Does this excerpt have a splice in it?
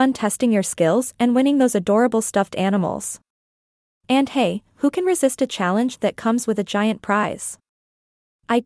no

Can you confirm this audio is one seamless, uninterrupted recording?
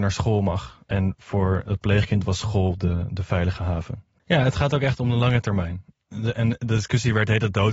no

